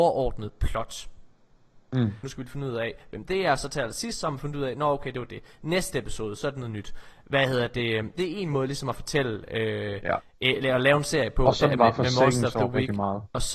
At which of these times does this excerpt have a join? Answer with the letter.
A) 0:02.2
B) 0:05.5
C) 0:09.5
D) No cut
A